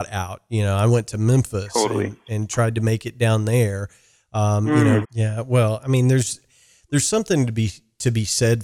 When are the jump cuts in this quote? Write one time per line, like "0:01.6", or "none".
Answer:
0:05.0